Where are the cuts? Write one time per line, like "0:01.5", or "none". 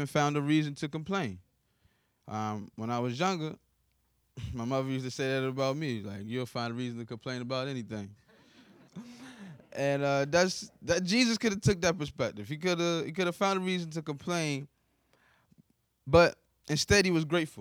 0:08.9